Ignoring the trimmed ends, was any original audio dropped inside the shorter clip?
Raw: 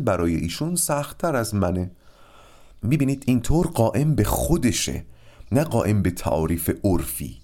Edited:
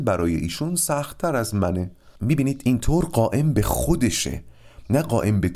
yes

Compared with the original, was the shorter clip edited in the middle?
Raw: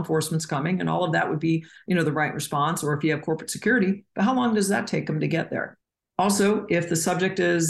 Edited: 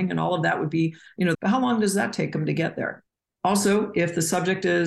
yes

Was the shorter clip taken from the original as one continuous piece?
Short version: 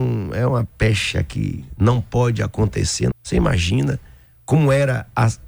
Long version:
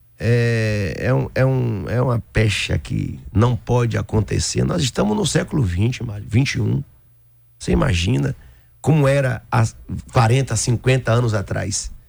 no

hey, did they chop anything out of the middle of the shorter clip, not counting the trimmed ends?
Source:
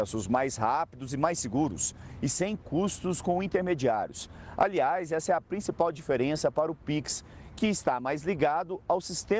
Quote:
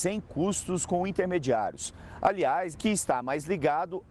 yes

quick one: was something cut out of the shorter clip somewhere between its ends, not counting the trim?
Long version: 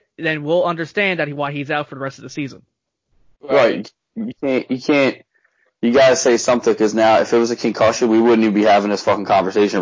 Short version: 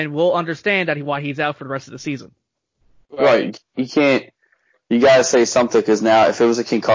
yes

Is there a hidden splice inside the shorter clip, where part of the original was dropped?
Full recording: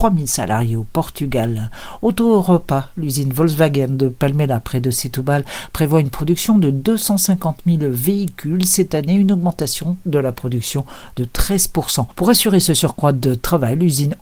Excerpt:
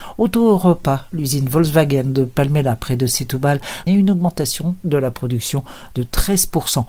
yes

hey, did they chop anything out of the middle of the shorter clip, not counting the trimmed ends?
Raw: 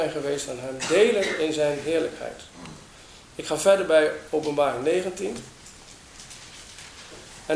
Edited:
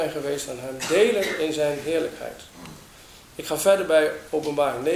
no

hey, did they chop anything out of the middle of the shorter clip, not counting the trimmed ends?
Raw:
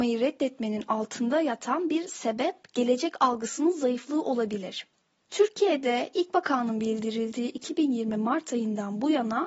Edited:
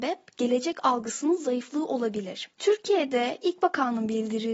yes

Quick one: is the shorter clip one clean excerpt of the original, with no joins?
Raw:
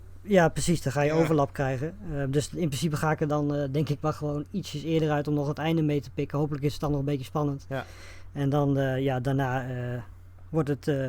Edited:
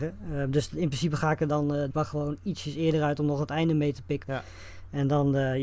no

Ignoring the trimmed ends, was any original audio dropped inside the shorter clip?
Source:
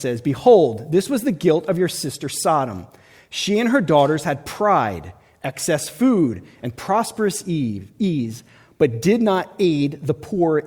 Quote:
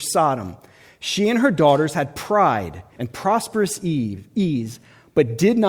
yes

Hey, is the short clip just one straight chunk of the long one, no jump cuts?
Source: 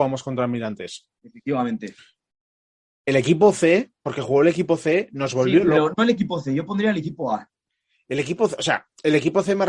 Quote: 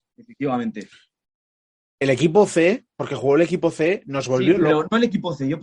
yes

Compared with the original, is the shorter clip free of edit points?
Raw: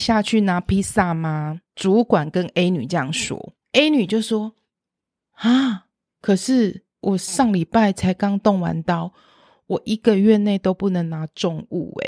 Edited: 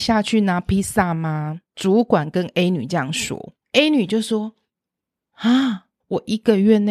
no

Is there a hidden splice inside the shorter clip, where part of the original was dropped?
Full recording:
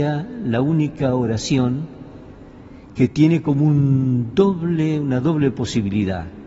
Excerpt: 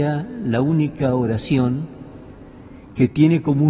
no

